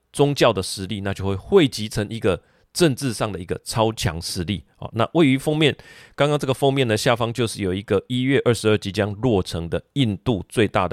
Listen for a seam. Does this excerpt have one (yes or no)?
no